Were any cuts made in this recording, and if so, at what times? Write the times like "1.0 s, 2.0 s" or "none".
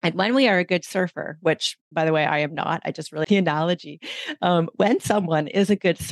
3.2 s